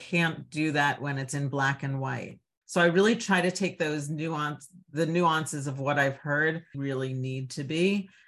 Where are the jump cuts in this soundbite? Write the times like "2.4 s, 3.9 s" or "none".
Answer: 2.6 s, 6.7 s